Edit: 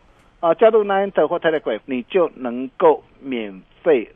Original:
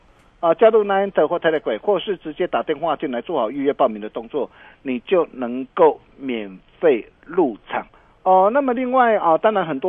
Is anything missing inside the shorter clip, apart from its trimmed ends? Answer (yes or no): yes